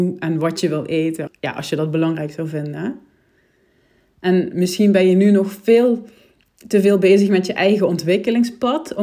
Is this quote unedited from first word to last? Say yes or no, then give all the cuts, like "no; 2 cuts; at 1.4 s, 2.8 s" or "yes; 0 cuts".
no; 1 cut; at 1.3 s